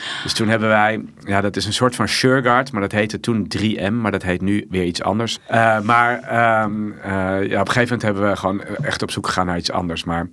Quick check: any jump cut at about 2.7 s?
no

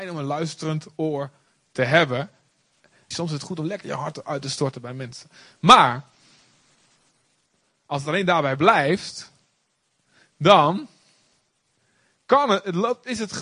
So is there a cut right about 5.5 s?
no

